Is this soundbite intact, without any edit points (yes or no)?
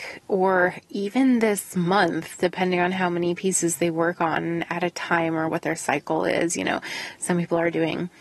yes